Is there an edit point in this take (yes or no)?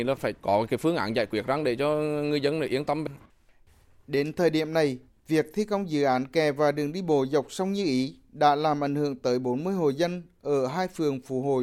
no